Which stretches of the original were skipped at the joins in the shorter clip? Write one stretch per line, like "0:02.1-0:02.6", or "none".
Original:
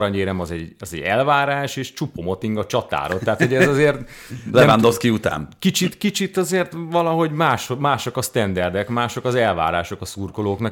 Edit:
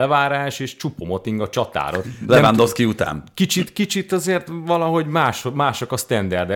0:03.2-0:04.3